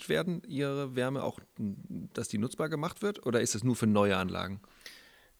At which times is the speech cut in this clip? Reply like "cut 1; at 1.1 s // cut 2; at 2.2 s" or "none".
none